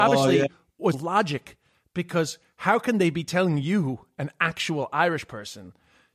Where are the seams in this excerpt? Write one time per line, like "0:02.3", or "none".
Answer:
0:00.9